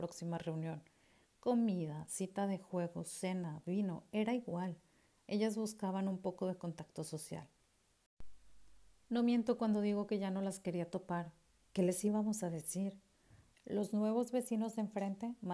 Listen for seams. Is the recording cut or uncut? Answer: cut